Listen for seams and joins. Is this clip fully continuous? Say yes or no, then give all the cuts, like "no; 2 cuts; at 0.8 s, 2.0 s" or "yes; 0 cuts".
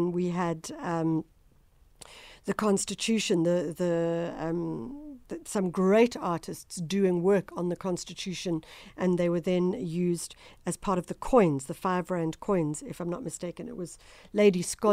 yes; 0 cuts